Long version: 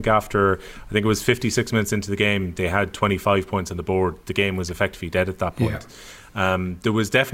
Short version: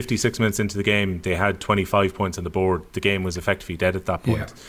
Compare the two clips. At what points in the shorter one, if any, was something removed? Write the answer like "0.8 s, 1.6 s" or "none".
none